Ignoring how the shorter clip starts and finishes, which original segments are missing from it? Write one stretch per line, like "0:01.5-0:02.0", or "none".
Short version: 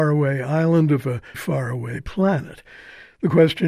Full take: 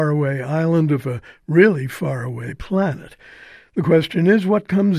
0:01.3-0:01.9